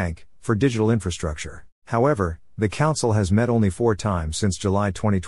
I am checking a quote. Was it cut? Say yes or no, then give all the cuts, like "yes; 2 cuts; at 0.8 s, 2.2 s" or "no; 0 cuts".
yes; 1 cut; at 1.7 s